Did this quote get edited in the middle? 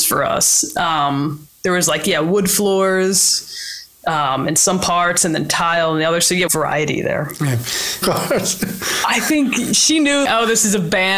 yes; 3 cuts; at 6.5 s, 8.0 s, 10.2 s

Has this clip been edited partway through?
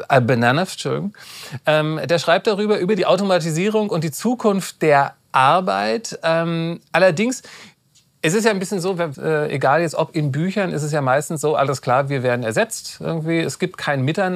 yes; 1 cut; at 9.1 s

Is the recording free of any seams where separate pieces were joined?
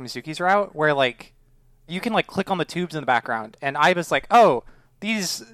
yes; 0 cuts

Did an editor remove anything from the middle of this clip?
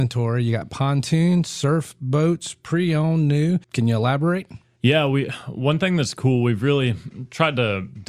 yes; 1 cut; at 3.6 s

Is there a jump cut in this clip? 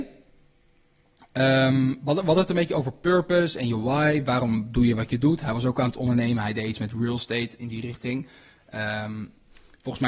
no; 0 cuts

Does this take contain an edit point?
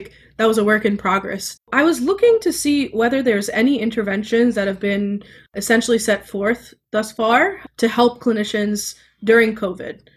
yes; 1 cut; at 1.6 s

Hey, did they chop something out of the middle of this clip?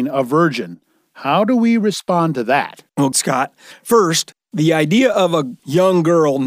yes; 1 cut; at 3.1 s

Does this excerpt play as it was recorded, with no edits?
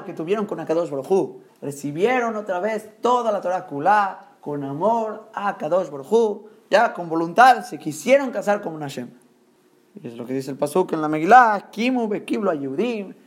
no; 1 cut; at 1.5 s

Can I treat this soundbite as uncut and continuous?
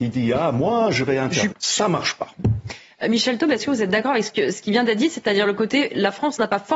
no; 1 cut; at 1.5 s

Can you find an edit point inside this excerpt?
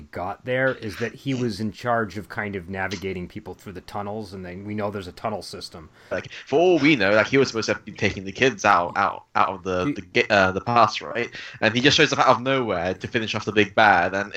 yes; 1 cut; at 6.1 s

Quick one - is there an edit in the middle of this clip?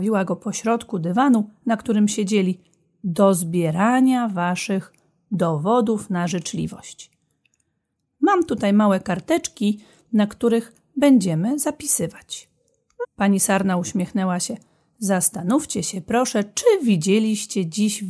yes; 1 cut; at 13.0 s

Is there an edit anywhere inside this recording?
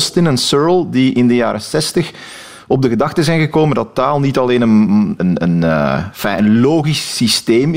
yes; 1 cut; at 5.2 s

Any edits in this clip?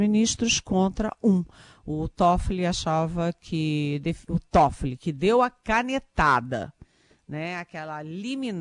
no; 0 cuts

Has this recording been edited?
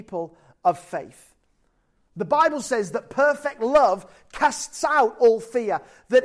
yes; 1 cut; at 2.0 s

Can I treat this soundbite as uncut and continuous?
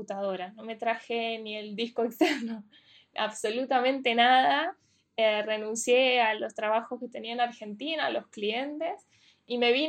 yes; 0 cuts

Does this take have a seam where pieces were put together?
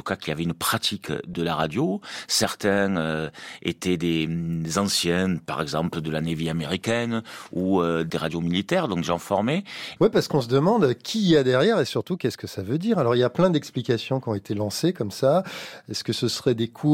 yes; 1 cut; at 10.0 s

